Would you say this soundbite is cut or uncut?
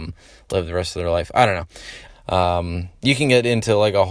cut